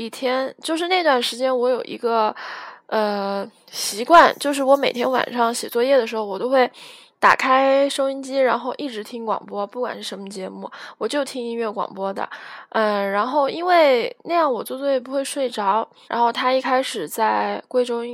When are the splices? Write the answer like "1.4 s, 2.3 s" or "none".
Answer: 16.0 s